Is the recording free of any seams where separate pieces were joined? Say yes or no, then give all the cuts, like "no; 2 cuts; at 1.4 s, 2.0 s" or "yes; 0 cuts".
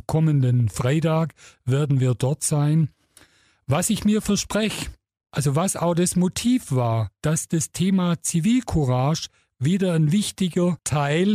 yes; 0 cuts